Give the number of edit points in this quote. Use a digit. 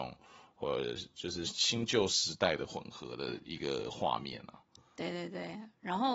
1